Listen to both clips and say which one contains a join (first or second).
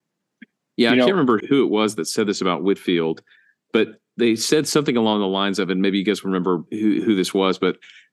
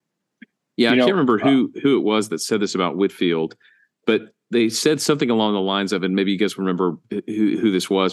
first